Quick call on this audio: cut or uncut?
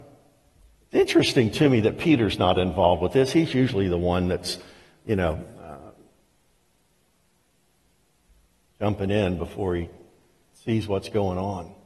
uncut